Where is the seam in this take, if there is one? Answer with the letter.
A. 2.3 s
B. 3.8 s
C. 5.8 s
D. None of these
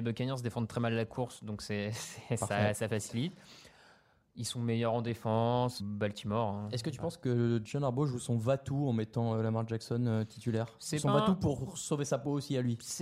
C